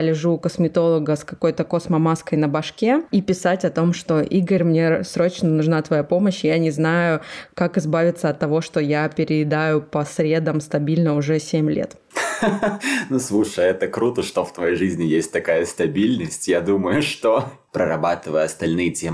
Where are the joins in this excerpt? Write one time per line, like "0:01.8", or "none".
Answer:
none